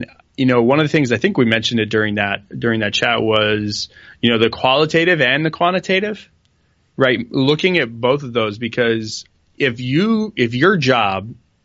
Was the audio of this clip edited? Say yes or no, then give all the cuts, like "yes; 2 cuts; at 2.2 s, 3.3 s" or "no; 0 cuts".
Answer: no; 0 cuts